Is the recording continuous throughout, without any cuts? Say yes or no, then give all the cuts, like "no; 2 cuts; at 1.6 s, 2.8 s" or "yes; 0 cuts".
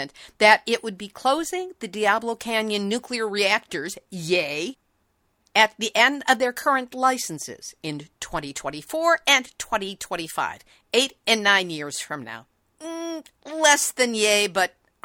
yes; 0 cuts